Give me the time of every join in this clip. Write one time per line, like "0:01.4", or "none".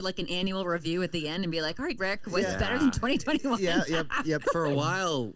0:02.0
0:04.4